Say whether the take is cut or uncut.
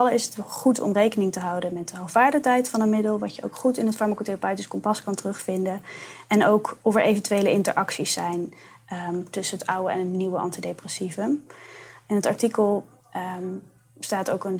uncut